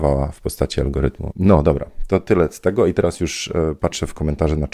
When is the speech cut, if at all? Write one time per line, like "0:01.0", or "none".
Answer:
0:01.3